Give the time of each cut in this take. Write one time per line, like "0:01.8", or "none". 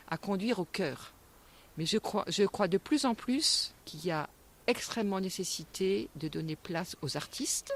0:01.7
0:03.8